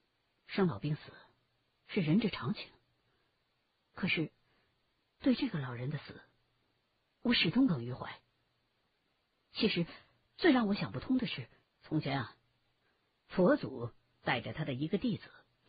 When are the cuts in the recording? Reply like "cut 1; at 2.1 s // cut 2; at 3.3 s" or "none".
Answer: cut 1; at 7.7 s // cut 2; at 11.6 s